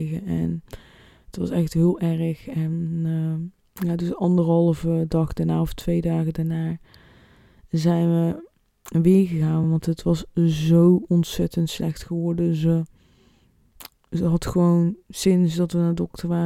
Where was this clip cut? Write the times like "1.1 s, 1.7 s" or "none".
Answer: none